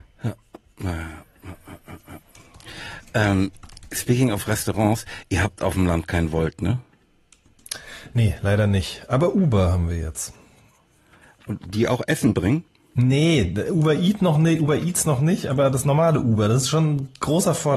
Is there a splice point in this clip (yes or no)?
no